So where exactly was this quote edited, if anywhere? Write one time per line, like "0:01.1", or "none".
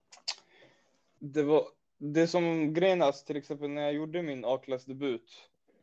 0:01.2